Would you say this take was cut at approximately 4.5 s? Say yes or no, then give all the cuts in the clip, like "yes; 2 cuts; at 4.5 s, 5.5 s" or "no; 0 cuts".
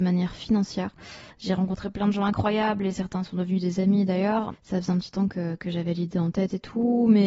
yes; 2 cuts; at 1.3 s, 4.5 s